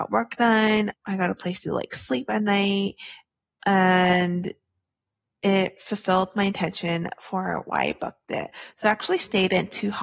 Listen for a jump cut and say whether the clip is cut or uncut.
cut